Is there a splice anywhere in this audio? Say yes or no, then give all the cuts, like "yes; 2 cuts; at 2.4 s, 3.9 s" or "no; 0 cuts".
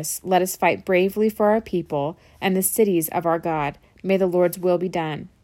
no; 0 cuts